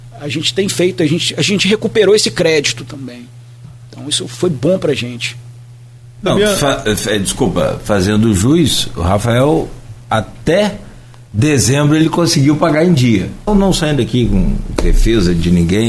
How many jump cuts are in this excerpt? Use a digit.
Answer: 2